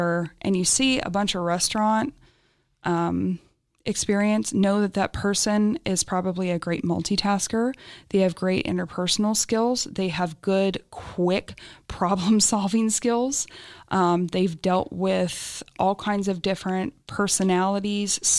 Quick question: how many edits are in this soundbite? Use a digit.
0